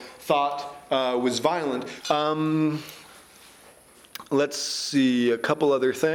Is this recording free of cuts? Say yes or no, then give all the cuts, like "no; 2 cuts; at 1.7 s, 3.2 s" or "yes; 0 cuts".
no; 1 cut; at 2.0 s